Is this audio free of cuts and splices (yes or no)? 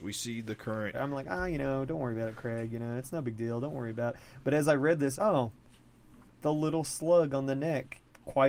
no